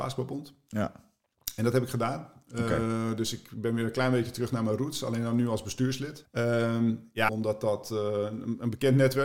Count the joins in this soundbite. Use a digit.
2